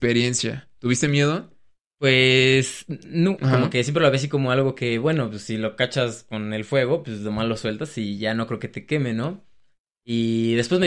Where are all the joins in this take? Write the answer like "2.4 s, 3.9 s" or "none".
3.4 s